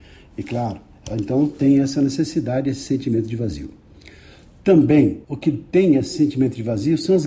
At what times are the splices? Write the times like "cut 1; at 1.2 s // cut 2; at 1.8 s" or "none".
cut 1; at 5.2 s